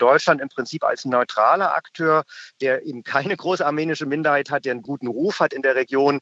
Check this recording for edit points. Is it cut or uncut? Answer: uncut